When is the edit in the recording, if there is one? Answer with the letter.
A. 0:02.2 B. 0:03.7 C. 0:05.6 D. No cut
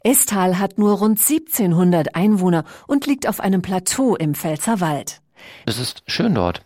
C